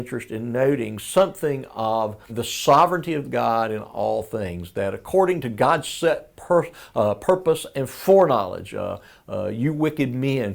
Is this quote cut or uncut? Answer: cut